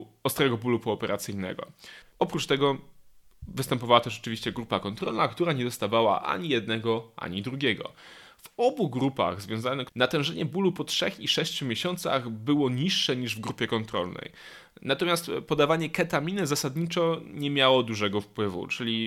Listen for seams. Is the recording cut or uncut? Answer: cut